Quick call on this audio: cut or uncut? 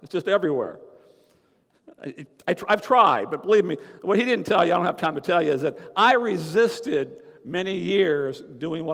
uncut